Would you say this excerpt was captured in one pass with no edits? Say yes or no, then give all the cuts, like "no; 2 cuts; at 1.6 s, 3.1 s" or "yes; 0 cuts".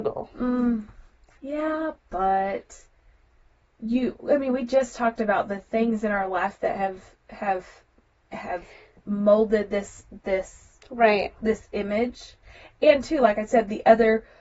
yes; 0 cuts